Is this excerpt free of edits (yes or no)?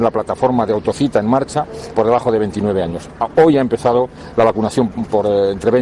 no